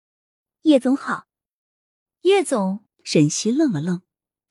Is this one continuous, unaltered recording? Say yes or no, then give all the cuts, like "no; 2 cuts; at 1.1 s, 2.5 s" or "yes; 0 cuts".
no; 1 cut; at 2.9 s